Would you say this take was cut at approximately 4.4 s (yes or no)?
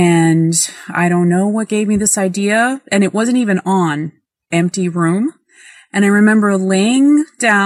yes